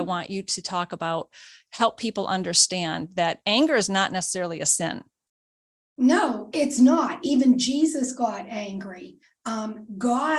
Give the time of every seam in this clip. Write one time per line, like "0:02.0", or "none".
none